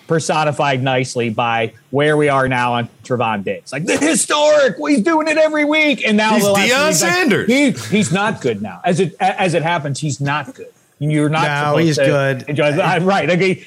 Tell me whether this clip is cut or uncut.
uncut